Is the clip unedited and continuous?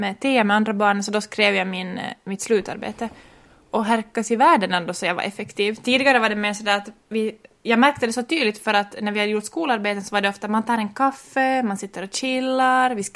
yes; 0 cuts

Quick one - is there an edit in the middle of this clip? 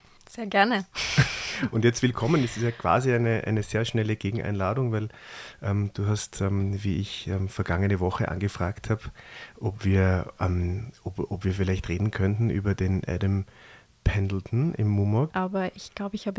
yes; 1 cut; at 15.3 s

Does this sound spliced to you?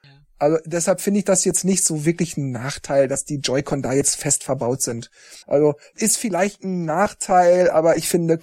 yes; 1 cut; at 5.4 s

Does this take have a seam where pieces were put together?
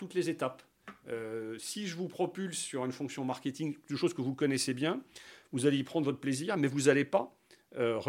no; 0 cuts

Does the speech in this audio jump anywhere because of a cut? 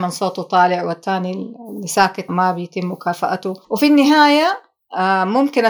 yes; 2 cuts; at 2.3 s, 3.6 s

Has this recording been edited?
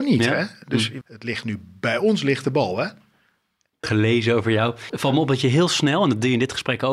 yes; 3 cuts; at 1.0 s, 3.8 s, 4.9 s

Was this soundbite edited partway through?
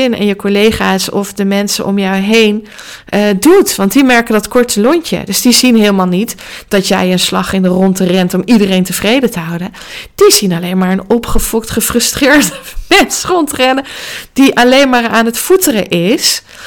no; 0 cuts

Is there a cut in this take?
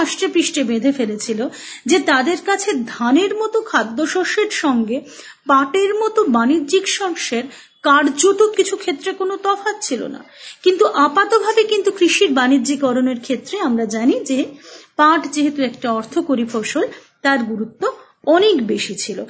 yes; 1 cut; at 8.5 s

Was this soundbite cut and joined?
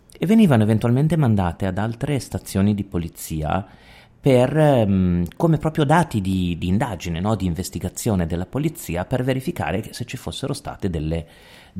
no; 0 cuts

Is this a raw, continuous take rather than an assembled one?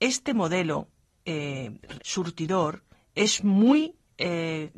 no; 1 cut; at 2.0 s

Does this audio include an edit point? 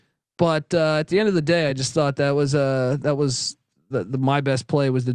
no; 0 cuts

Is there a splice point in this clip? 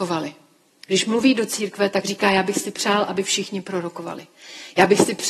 no; 0 cuts

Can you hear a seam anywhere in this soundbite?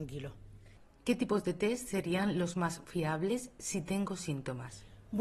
no; 0 cuts

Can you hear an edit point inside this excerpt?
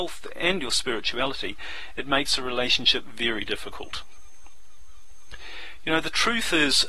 no; 0 cuts

